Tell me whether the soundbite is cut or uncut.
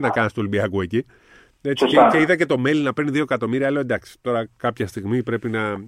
uncut